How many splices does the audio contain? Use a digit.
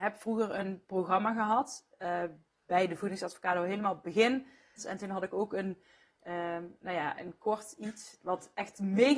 1